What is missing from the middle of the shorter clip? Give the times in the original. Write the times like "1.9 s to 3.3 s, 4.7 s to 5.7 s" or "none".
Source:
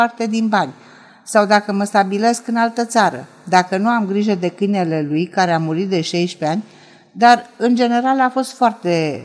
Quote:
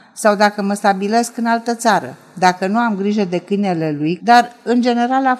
5.3 s to 7.1 s